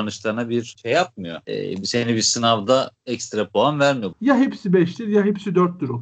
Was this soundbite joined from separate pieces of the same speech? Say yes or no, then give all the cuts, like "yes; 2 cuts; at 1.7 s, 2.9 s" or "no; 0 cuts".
yes; 1 cut; at 4.1 s